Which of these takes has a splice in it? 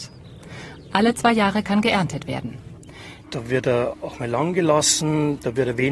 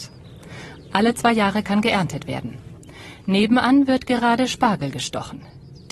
first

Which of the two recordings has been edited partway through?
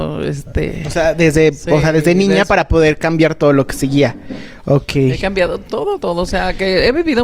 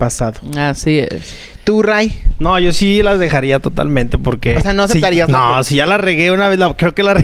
first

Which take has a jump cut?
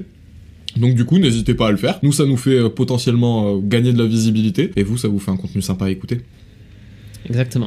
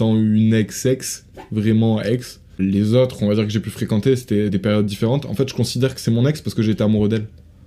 second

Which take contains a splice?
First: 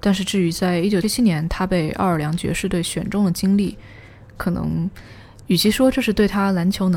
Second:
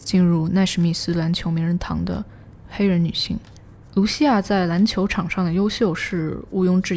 first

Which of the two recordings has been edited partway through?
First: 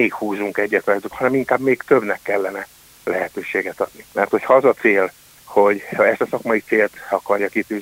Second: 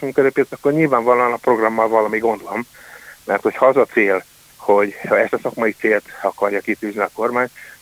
first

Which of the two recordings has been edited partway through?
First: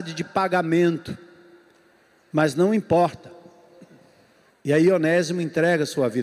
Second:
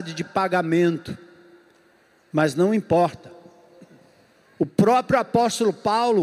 first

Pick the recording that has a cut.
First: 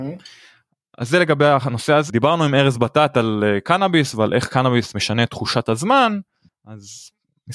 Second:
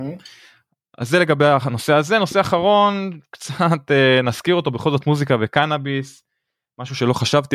first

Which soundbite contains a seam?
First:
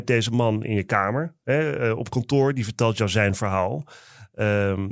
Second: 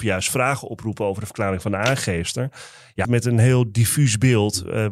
second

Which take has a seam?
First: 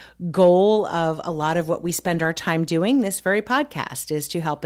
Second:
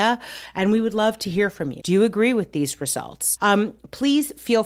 second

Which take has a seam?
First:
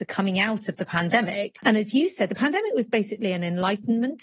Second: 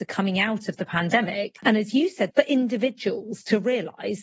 second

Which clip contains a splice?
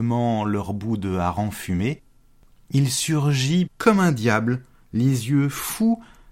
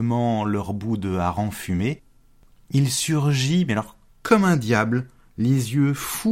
first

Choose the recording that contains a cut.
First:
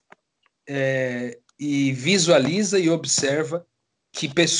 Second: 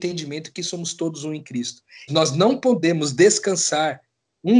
second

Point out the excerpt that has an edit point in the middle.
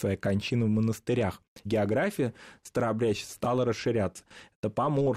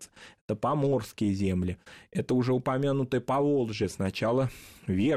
first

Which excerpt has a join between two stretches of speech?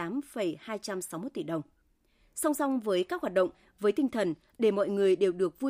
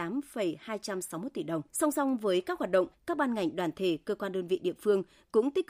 second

